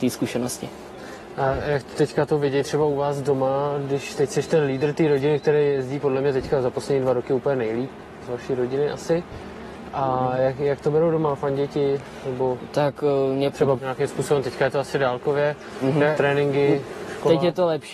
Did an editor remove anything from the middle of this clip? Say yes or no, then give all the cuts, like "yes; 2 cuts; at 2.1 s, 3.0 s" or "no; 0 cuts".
yes; 2 cuts; at 13.8 s, 16.2 s